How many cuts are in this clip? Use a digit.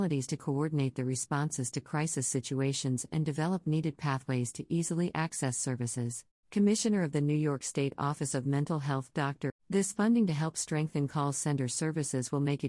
2